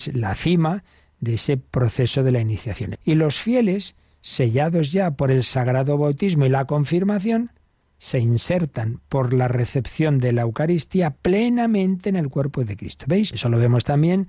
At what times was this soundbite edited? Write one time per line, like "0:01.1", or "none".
0:02.9
0:13.3